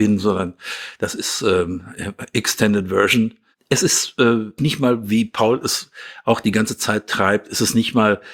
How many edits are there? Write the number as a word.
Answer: one